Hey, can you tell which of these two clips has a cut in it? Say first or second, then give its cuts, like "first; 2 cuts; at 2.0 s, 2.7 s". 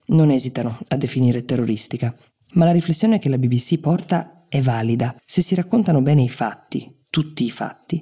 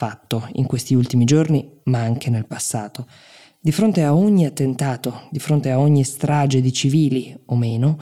first; 1 cut; at 5.2 s